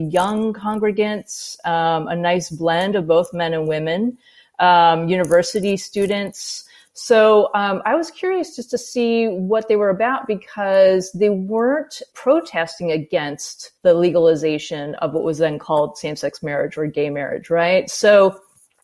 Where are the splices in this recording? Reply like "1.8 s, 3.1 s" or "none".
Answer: 12.1 s, 13.8 s